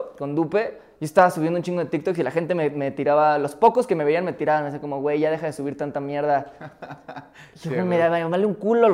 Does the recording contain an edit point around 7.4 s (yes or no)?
no